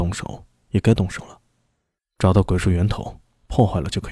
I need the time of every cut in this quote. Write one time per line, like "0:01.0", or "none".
0:02.0